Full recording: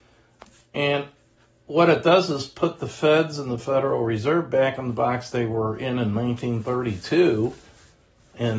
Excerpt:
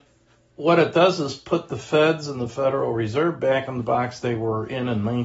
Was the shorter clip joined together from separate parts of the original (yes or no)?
no